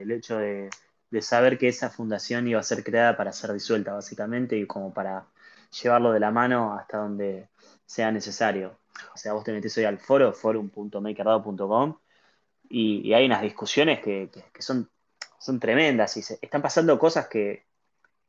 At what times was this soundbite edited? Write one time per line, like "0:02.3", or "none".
0:09.2